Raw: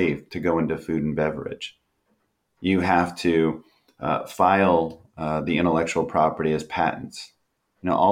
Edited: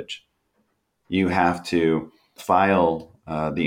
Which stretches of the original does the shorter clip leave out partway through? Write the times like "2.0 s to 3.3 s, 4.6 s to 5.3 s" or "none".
3.9 s to 4.3 s